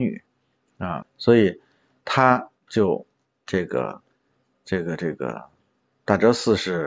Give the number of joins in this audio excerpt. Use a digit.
1